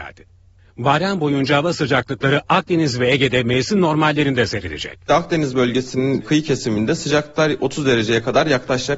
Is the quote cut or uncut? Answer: uncut